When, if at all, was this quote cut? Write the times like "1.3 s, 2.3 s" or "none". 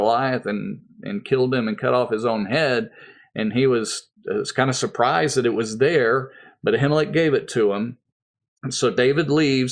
none